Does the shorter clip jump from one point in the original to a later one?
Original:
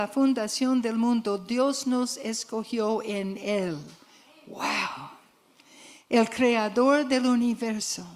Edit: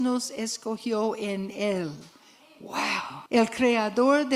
yes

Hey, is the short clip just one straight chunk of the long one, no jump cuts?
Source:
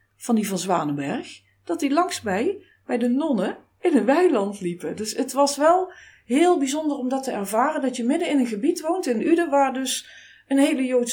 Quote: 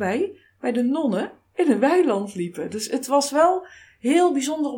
yes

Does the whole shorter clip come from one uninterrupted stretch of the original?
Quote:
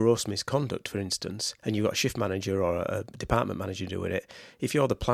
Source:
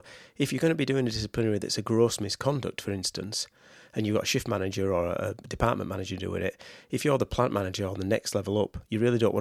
no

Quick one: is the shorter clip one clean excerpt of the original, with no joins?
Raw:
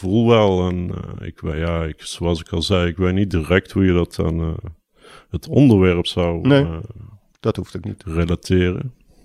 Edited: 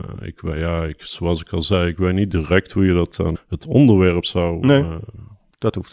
no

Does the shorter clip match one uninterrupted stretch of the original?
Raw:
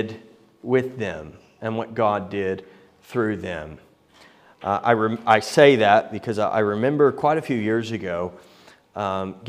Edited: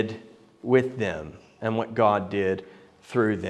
yes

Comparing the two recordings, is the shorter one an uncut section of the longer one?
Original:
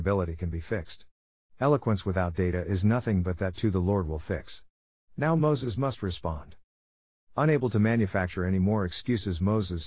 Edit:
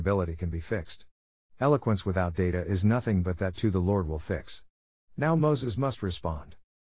yes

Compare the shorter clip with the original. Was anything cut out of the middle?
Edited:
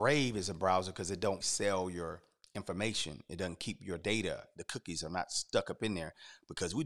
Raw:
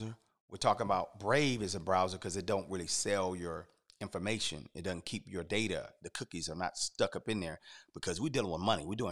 yes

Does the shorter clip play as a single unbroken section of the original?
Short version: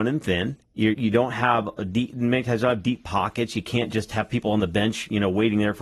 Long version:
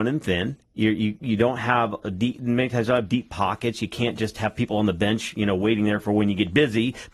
no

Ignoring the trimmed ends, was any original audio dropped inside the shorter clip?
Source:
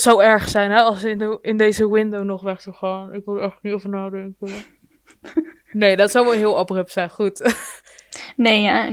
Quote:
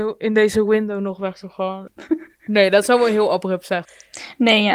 yes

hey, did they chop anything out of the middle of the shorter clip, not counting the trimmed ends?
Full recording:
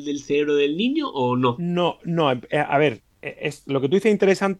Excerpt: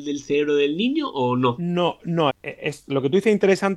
yes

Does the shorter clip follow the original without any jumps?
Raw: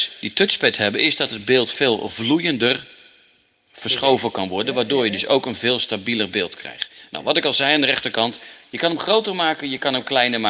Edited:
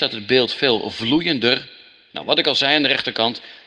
no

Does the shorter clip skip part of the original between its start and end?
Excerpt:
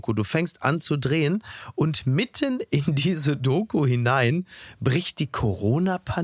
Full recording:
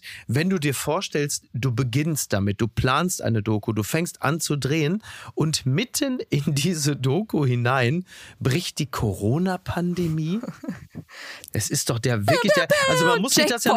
no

